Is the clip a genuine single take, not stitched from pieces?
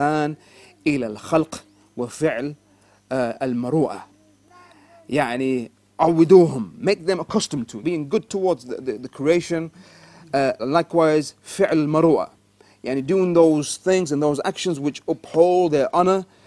no; 2 cuts; at 7.8 s, 10.6 s

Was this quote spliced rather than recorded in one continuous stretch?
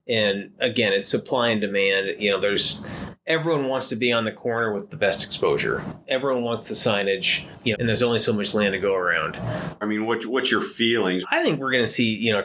yes; 3 cuts; at 7.7 s, 9.8 s, 11.2 s

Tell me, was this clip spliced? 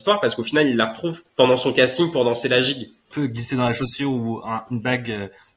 yes; 2 cuts; at 1.3 s, 3.1 s

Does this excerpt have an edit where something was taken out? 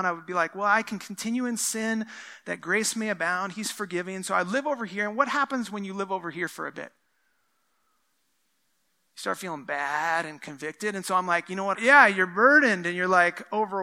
yes; 1 cut; at 11.7 s

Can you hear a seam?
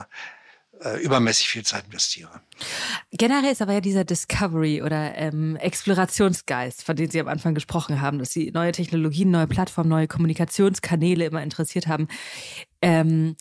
no; 0 cuts

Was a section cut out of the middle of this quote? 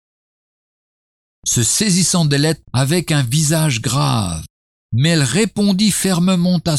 yes; 1 cut; at 2.6 s

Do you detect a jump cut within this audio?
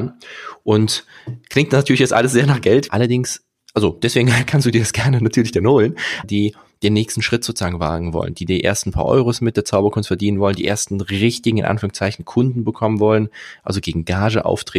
yes; 2 cuts; at 2.9 s, 6.2 s

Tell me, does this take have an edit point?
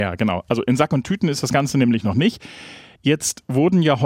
no; 0 cuts

